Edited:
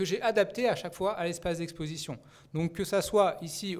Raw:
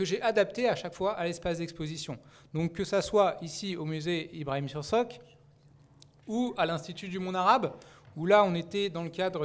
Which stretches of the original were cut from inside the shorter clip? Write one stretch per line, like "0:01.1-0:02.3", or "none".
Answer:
none